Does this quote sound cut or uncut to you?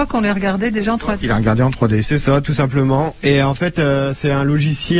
cut